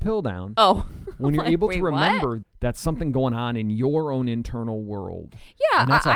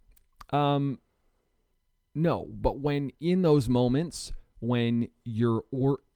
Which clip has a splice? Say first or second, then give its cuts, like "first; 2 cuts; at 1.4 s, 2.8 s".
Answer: first; 1 cut; at 2.4 s